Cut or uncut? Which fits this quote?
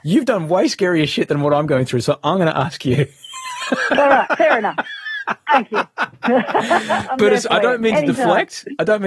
uncut